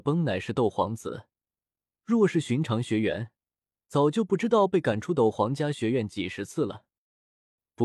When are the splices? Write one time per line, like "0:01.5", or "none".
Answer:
none